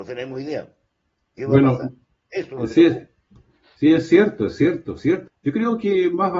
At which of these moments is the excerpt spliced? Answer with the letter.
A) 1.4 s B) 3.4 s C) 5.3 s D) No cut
C